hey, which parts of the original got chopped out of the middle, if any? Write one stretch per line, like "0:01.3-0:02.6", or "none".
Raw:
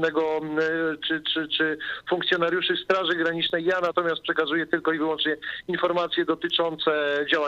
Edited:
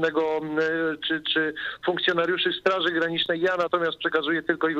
0:01.3-0:01.5